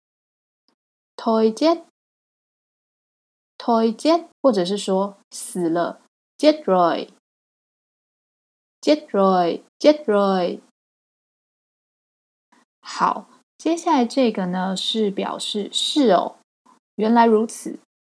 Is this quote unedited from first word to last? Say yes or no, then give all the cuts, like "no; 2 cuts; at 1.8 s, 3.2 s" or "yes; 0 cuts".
no; 2 cuts; at 4.3 s, 9.7 s